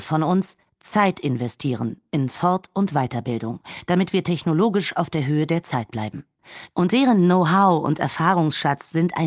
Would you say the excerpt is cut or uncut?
cut